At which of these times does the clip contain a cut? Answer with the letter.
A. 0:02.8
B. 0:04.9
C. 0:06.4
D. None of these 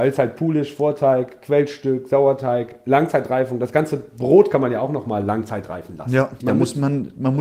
C